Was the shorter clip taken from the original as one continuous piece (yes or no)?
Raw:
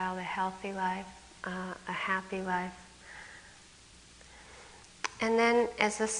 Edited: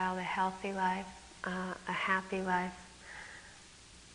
yes